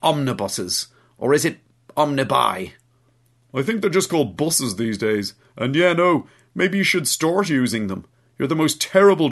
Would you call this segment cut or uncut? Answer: uncut